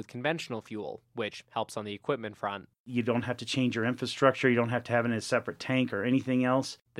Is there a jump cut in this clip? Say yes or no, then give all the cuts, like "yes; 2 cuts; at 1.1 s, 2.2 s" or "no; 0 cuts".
no; 0 cuts